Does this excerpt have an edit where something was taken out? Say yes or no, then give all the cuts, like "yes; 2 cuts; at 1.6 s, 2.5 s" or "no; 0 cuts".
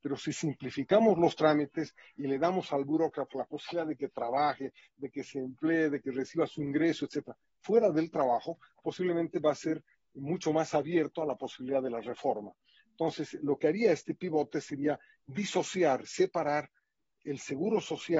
no; 0 cuts